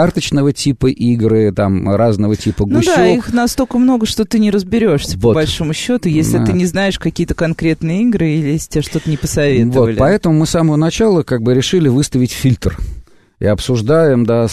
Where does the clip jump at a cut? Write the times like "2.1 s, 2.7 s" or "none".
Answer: none